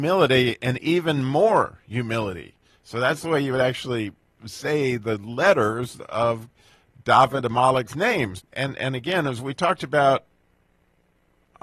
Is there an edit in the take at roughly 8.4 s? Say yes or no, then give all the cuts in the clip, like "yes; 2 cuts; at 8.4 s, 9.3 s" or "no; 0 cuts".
yes; 1 cut; at 8.4 s